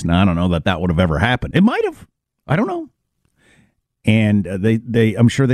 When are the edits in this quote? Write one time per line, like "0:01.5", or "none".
0:01.5

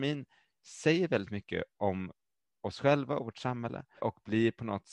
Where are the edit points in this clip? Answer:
0:04.0

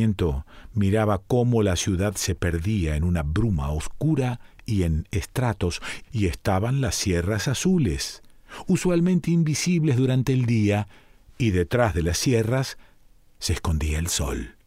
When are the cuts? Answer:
0:06.0

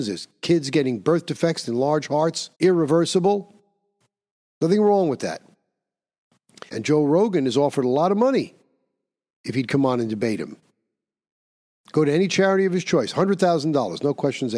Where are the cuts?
0:02.5
0:06.7

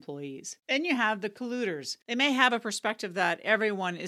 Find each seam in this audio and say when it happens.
0:02.0

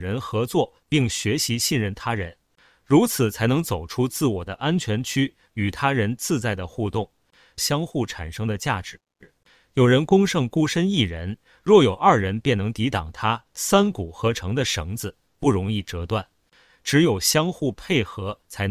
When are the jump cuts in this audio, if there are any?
0:07.6
0:16.7

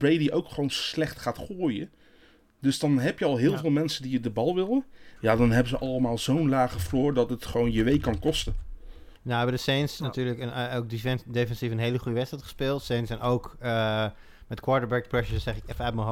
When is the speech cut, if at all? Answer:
0:05.2
0:09.2

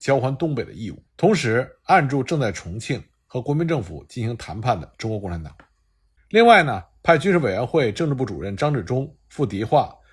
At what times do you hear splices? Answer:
0:01.1
0:06.2

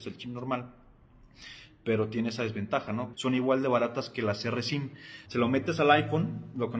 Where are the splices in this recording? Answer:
0:03.1
0:05.3

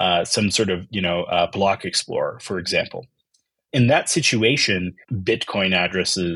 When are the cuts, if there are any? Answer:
0:03.7
0:05.0

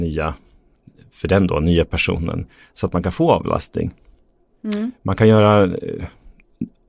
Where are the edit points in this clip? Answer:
none

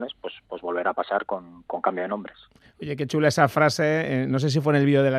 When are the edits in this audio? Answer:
none

